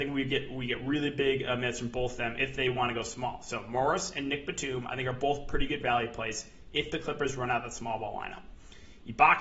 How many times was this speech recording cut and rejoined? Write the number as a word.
zero